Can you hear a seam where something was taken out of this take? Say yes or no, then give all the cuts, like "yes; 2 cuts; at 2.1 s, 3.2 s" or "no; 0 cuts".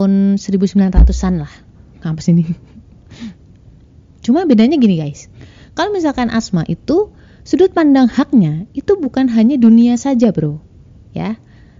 no; 0 cuts